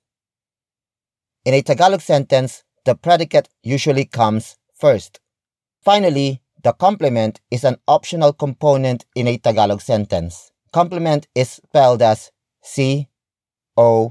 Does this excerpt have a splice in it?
yes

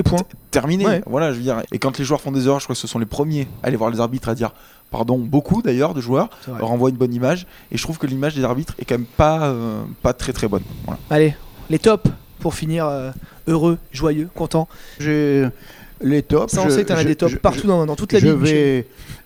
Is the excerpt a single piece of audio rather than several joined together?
no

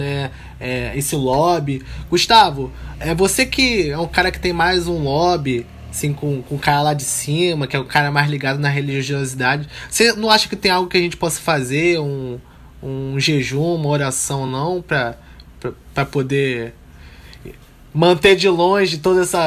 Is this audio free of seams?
yes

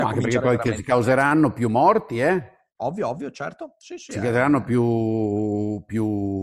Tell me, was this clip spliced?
no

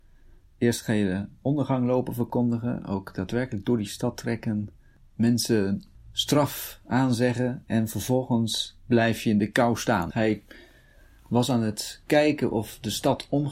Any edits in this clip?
yes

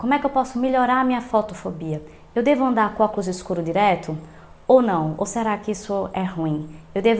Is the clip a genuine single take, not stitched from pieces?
yes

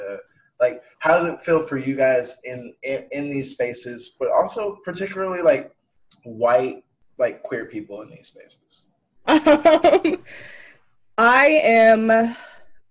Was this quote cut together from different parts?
yes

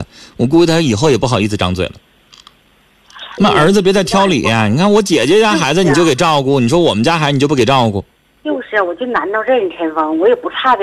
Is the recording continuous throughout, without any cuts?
no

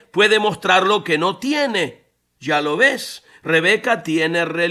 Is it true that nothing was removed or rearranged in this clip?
yes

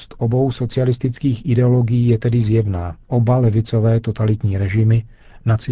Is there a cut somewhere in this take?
yes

